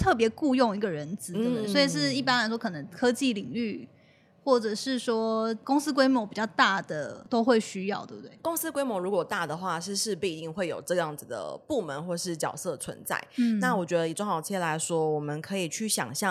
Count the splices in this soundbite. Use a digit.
0